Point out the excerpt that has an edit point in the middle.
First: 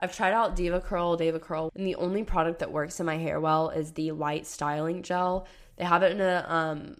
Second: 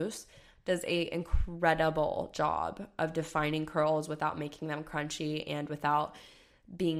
first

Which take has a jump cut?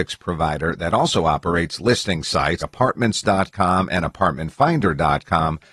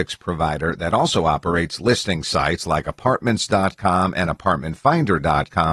first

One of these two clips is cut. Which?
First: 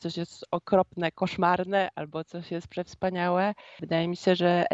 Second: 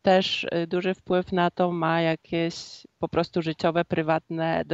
first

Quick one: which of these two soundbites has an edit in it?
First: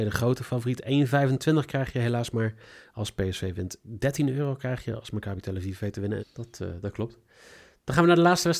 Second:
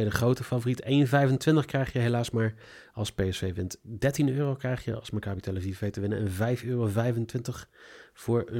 first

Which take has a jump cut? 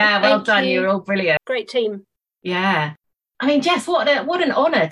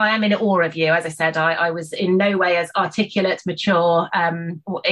first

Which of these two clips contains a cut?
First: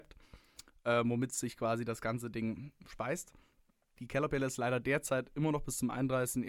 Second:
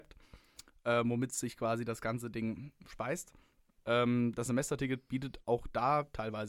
second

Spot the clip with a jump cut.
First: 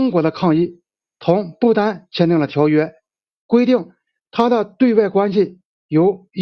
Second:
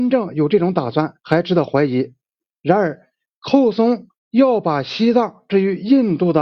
second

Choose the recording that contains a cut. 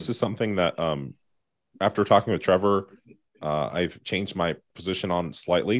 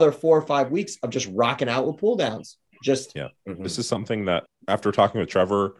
second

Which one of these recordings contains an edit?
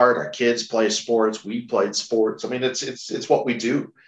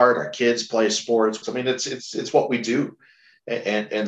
second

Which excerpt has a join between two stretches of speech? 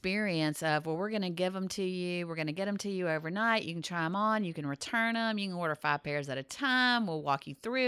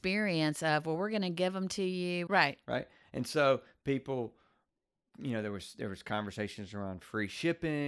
second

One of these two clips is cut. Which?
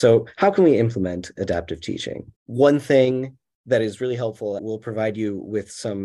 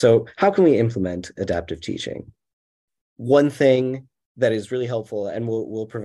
first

